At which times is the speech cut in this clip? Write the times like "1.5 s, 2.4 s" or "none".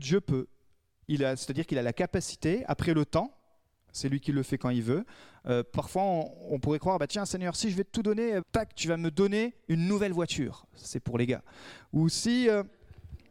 8.4 s